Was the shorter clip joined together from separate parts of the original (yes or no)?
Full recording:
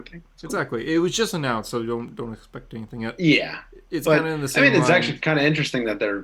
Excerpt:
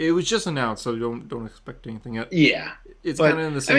no